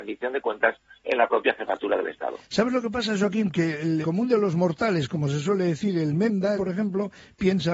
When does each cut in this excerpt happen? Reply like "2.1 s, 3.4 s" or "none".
4.0 s, 6.6 s